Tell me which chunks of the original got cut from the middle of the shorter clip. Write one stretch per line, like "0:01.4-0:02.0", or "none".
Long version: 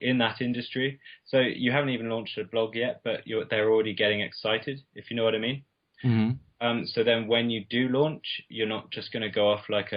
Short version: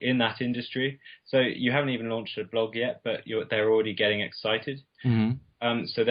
0:04.9-0:05.9